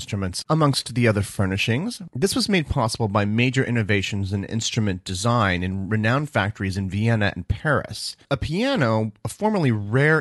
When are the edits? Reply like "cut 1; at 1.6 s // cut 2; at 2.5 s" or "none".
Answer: none